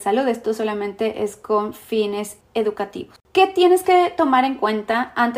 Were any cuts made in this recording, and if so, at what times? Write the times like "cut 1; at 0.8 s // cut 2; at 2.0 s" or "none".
none